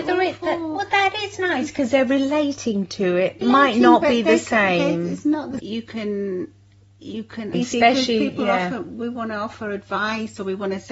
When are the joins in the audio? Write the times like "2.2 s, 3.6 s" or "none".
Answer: 3.4 s, 5.6 s, 7.5 s

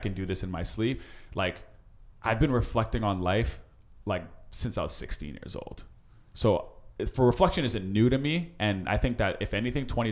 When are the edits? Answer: none

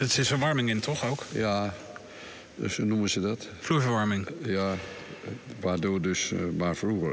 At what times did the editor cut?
none

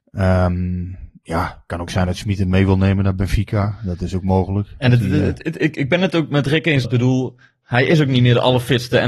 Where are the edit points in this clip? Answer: 6.8 s

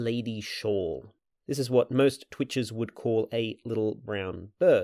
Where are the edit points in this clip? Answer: 1.3 s

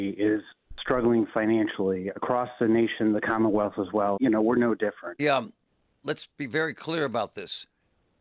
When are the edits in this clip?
4.2 s, 5.2 s

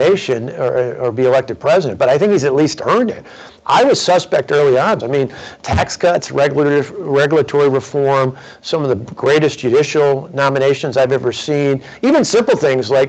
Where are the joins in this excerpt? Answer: 5.0 s

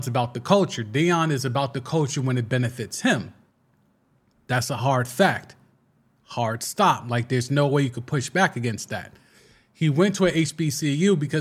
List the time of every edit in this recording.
none

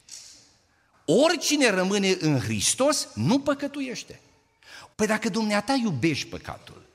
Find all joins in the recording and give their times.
0.9 s, 4.9 s

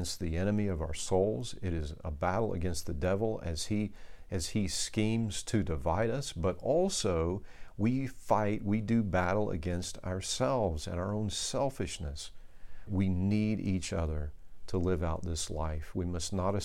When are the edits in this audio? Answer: 12.9 s

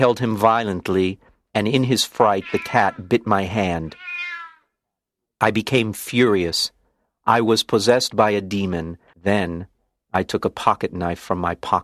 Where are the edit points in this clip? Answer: 9.1 s

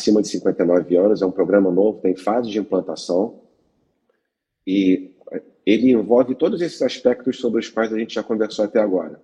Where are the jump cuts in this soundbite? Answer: none

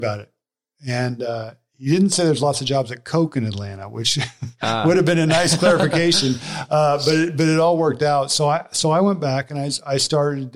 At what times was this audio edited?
none

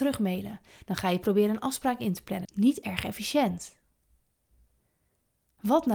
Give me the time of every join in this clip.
2.4 s

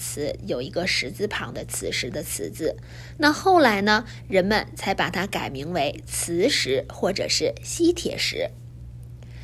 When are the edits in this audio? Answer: none

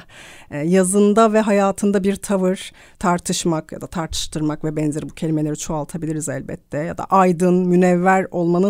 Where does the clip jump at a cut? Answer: 2.9 s

